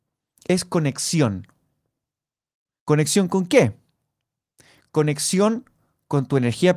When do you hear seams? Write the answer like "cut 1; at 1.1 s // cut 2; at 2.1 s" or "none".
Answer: none